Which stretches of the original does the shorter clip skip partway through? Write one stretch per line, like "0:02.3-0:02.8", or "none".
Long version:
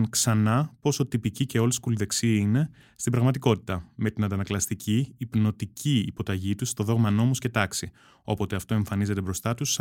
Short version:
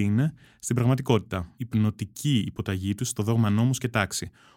0:03.9-0:05.2